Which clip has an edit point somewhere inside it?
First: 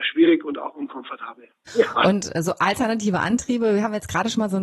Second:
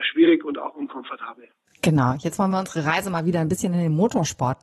first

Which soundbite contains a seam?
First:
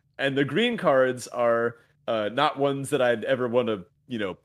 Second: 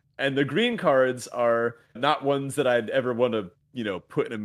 second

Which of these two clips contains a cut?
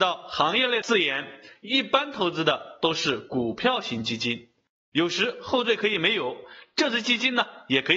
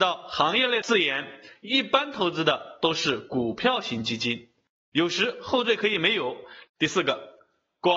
second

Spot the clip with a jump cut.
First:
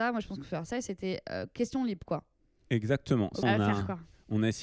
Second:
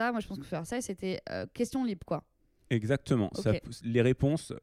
first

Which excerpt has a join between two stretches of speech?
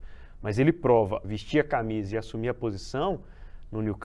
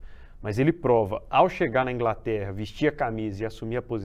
first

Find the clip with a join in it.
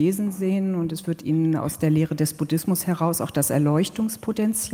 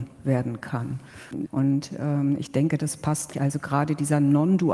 second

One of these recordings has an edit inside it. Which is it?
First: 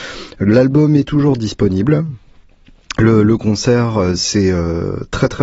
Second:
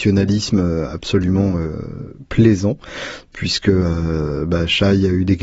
first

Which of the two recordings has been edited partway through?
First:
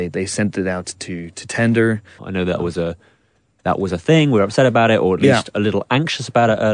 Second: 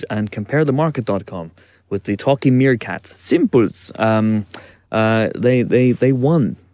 first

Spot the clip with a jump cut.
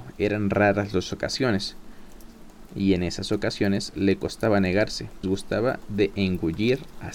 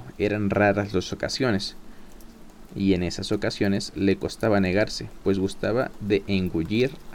first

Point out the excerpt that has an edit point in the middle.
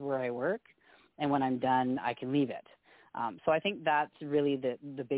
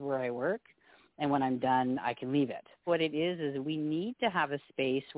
second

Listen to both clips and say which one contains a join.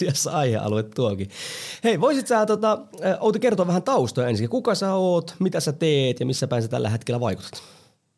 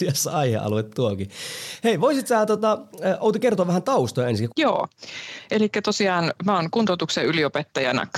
second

